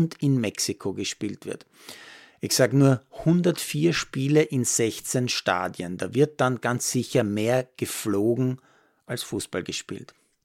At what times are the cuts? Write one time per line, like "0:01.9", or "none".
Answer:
none